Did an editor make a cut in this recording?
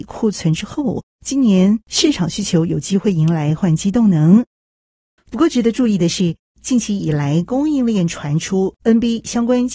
yes; 1 cut; at 5.2 s

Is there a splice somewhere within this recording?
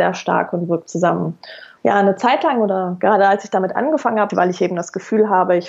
yes; 2 cuts; at 1.8 s, 4.3 s

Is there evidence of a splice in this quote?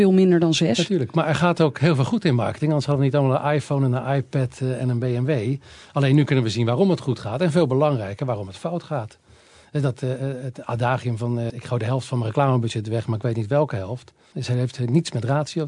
yes; 2 cuts; at 11.5 s, 14.3 s

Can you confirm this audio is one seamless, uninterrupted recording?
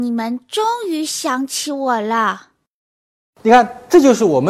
no; 1 cut; at 3.3 s

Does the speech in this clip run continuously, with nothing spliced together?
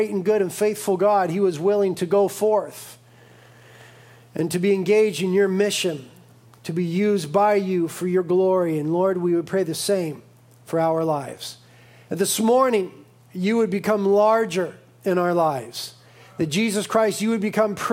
yes; 0 cuts

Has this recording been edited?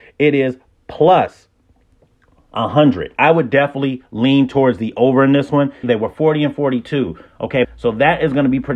yes; 2 cuts; at 5.8 s, 7.6 s

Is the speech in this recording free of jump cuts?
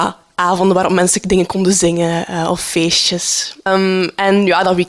no; 1 cut; at 3.7 s

